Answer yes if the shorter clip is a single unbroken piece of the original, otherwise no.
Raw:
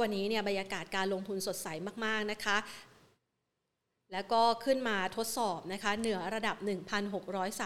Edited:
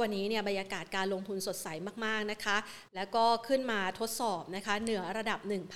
no